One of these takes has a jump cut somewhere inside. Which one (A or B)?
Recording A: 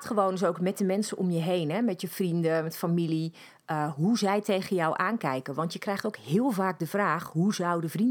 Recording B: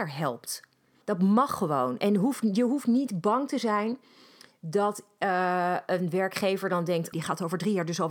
B